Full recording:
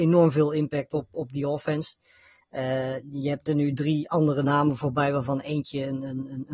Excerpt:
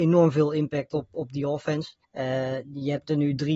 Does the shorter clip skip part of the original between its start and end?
yes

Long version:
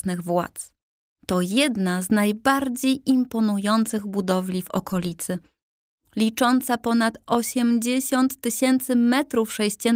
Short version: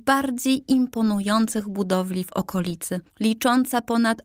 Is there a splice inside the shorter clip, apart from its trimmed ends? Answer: yes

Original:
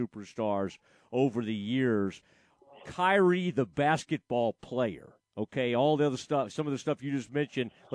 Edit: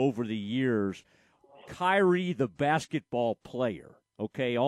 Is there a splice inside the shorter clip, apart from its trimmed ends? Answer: no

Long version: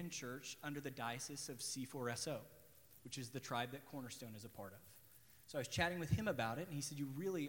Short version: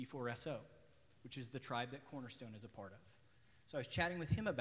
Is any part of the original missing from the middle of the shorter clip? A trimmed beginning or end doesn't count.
no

